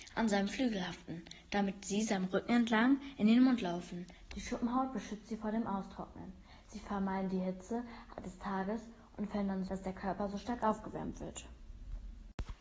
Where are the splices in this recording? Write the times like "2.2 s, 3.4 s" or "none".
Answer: 4.3 s, 9.7 s